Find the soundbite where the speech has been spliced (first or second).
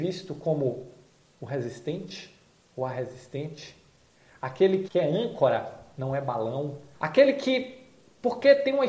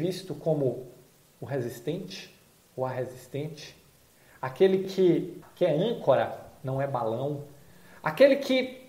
first